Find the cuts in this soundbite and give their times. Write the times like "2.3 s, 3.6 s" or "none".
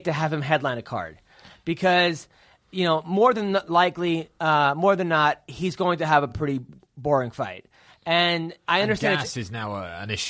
none